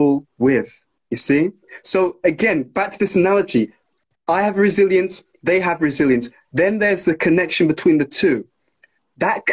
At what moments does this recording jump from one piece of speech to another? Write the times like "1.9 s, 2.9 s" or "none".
1.0 s